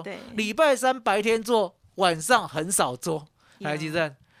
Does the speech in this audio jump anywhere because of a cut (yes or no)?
no